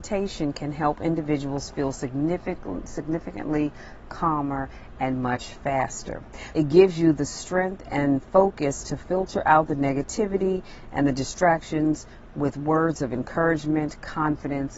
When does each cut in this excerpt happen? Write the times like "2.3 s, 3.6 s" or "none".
6.5 s